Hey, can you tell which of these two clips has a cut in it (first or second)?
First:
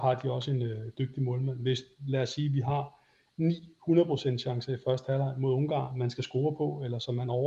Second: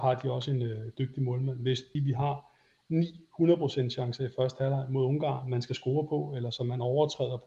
second